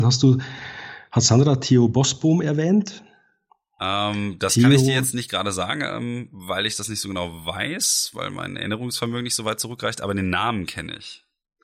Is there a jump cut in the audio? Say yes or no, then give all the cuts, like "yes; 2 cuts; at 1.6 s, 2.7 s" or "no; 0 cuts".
no; 0 cuts